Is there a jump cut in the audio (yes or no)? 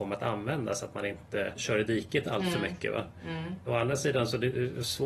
no